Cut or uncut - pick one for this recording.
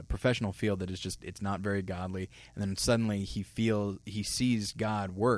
uncut